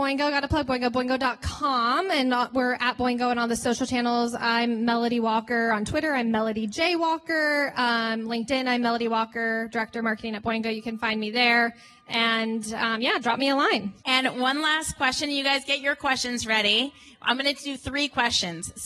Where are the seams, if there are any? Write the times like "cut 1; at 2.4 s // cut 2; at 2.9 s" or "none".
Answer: cut 1; at 14.0 s